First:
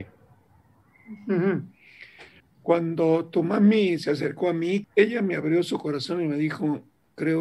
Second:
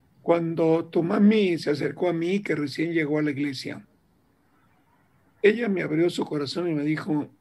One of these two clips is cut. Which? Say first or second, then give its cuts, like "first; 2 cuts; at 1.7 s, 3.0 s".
first; 2 cuts; at 2.4 s, 4.8 s